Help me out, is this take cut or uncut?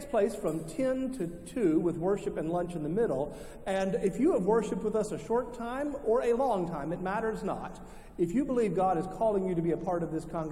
uncut